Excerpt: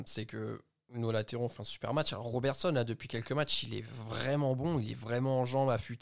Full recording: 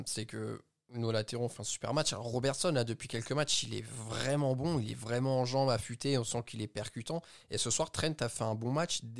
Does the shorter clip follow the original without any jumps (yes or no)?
yes